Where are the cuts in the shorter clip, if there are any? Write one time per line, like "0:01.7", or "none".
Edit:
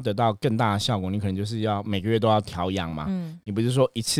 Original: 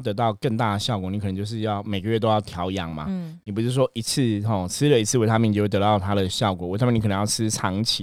none